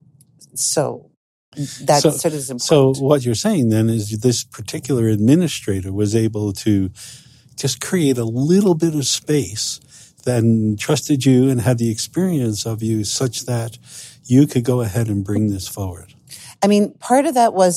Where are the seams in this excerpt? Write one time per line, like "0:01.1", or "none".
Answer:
0:16.6